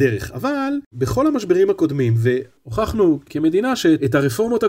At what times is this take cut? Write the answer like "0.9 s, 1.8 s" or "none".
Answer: none